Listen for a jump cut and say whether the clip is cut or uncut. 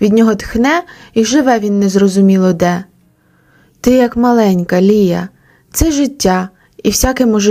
uncut